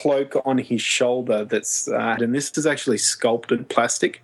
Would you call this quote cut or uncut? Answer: cut